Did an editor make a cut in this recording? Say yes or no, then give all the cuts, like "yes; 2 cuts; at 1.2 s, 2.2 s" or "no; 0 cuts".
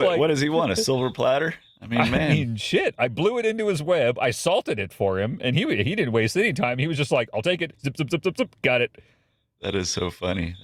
no; 0 cuts